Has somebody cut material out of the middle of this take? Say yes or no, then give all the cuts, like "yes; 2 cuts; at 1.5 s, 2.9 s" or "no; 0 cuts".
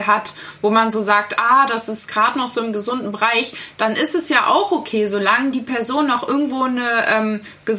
no; 0 cuts